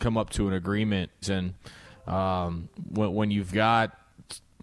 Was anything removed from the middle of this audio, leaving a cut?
yes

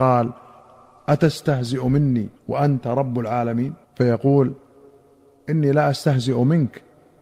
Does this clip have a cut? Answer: yes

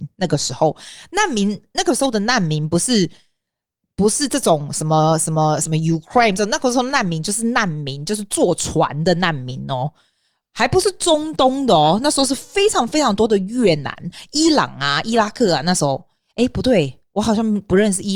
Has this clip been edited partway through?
no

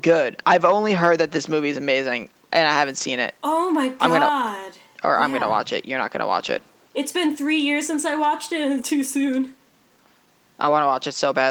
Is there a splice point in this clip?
yes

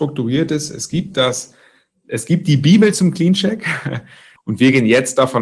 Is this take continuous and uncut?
no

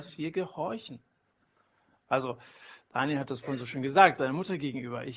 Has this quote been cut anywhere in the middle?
no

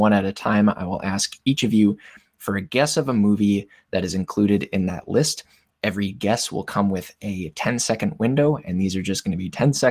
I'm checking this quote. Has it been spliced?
no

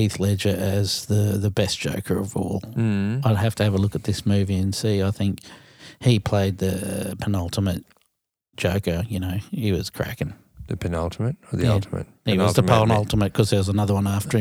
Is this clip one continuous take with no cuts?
yes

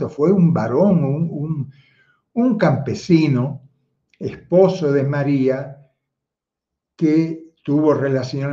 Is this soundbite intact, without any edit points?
yes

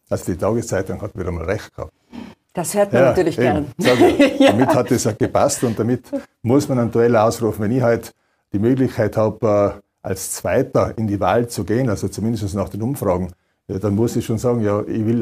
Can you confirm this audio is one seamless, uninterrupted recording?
yes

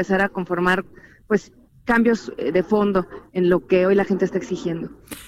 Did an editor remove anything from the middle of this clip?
no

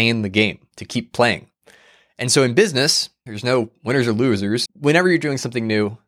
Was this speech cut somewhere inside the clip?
yes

